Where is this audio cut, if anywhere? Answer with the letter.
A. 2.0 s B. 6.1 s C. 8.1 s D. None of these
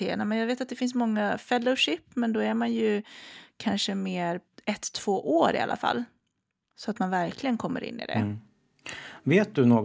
D